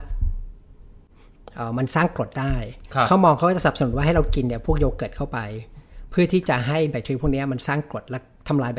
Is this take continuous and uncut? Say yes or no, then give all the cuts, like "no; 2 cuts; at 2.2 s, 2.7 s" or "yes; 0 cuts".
yes; 0 cuts